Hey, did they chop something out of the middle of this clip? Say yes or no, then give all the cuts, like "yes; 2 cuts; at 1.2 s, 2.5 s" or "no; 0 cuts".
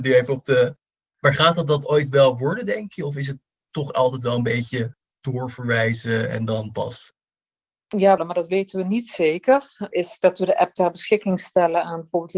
yes; 1 cut; at 8.2 s